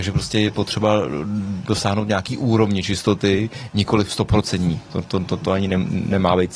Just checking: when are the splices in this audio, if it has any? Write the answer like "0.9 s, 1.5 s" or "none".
none